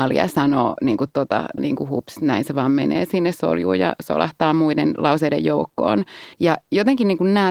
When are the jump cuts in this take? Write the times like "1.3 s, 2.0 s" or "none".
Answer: 1.6 s, 6.3 s

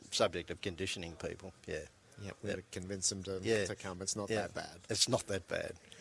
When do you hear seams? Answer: none

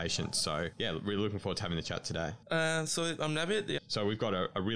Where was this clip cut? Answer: 2.4 s, 3.8 s

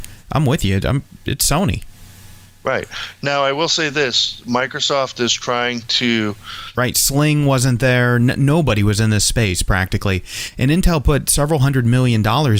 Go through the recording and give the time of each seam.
6.7 s

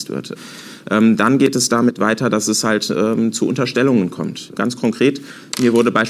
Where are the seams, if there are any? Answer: none

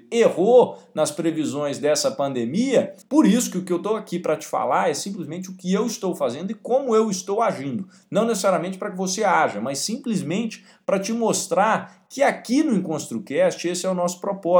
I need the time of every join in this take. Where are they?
3.0 s

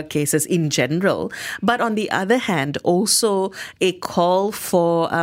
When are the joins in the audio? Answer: none

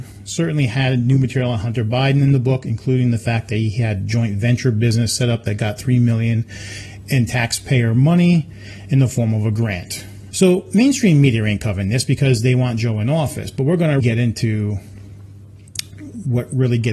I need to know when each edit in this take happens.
10.3 s, 14.0 s

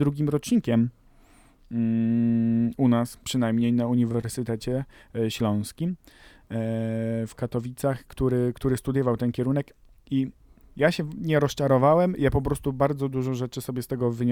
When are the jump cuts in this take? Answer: none

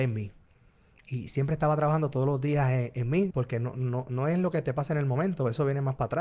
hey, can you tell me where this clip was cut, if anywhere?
3.3 s

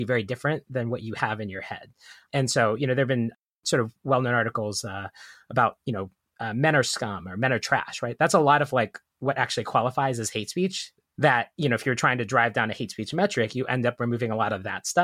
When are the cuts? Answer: none

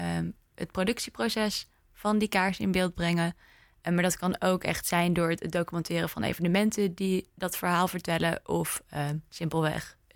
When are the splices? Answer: none

